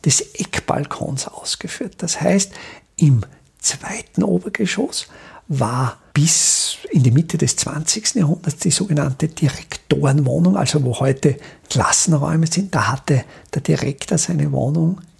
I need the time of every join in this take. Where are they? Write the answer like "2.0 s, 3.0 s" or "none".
none